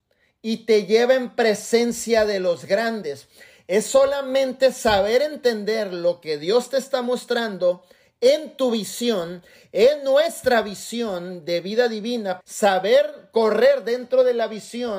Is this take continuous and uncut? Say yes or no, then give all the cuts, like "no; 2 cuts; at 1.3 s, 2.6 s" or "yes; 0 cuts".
no; 1 cut; at 12.4 s